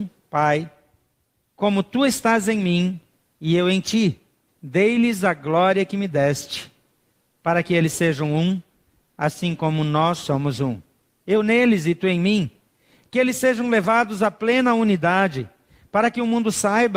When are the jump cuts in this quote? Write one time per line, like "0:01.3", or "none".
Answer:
0:04.5